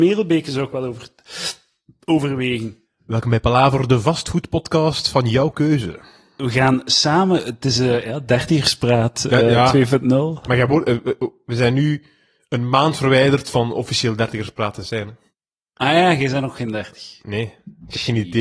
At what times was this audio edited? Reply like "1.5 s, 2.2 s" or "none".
none